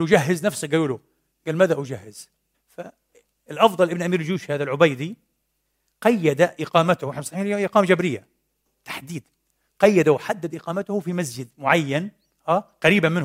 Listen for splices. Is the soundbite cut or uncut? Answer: cut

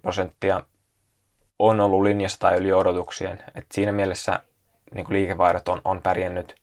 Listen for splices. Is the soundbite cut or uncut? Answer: uncut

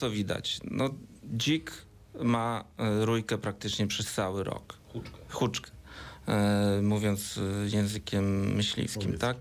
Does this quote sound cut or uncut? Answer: uncut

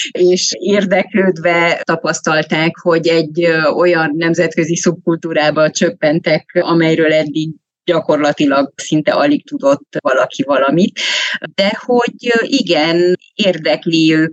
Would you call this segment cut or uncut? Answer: uncut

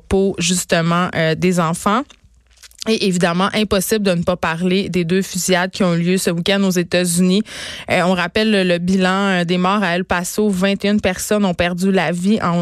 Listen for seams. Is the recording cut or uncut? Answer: uncut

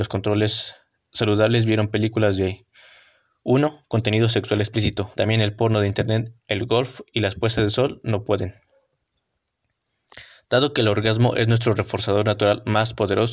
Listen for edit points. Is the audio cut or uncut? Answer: cut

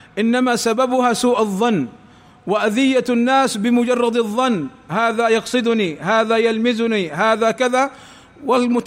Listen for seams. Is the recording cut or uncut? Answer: uncut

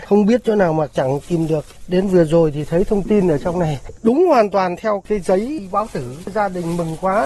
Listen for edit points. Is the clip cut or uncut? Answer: uncut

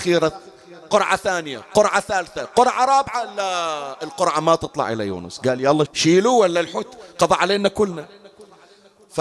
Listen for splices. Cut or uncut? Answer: cut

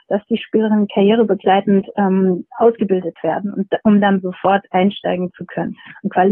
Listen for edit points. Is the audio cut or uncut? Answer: uncut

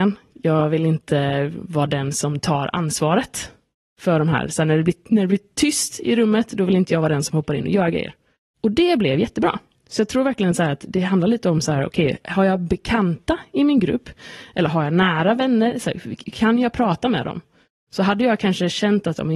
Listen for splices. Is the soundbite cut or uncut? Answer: uncut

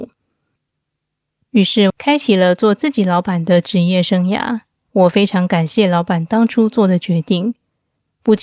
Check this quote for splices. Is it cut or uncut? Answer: cut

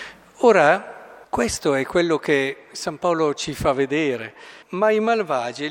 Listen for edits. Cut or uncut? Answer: cut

